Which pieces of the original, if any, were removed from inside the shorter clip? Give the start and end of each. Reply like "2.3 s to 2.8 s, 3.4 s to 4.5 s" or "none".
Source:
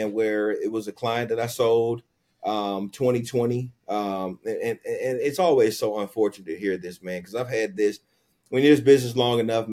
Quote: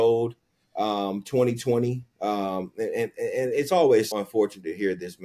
5.8 s to 5.9 s